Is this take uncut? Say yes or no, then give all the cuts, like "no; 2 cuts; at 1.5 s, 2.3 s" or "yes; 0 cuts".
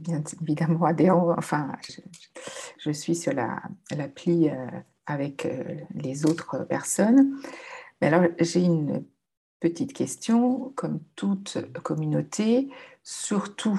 no; 1 cut; at 1.9 s